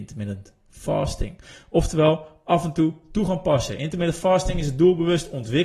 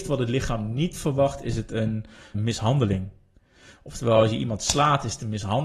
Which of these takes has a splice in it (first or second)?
second